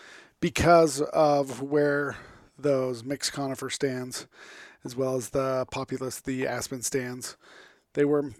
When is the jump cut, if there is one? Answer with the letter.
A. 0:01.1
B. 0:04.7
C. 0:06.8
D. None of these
D